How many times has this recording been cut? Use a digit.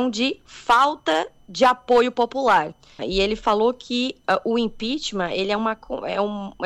1